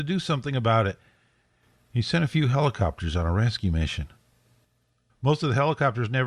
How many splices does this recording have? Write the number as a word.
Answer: one